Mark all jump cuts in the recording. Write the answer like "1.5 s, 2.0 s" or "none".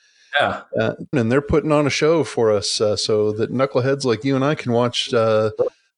1.1 s